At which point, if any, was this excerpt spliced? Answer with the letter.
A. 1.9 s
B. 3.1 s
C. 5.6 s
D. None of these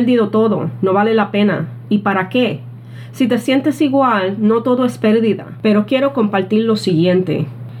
C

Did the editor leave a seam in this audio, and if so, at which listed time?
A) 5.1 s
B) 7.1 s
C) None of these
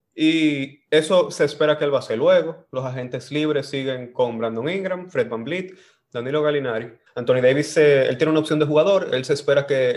B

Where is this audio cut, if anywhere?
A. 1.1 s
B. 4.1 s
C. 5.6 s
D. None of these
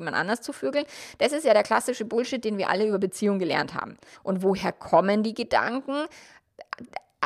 B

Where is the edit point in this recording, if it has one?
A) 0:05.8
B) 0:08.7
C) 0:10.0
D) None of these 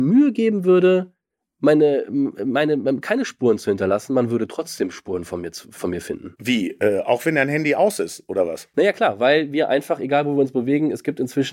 A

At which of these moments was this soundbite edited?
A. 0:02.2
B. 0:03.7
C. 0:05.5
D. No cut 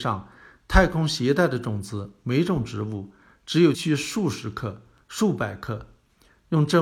B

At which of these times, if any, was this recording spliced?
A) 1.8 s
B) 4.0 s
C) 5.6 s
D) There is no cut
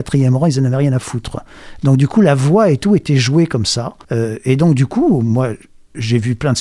B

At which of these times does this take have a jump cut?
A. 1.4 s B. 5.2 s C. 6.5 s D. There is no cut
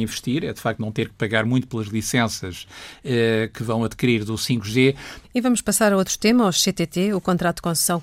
B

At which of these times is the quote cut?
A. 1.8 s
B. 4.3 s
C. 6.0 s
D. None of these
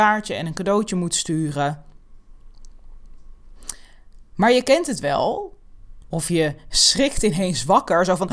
C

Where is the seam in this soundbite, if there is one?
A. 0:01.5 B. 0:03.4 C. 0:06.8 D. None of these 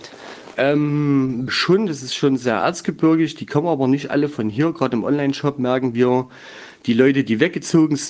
A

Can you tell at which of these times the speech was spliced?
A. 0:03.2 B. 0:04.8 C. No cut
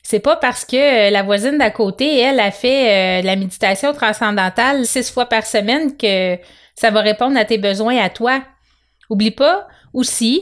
B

